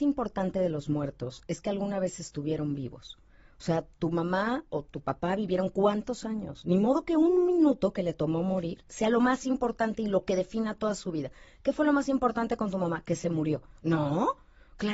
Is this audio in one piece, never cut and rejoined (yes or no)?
yes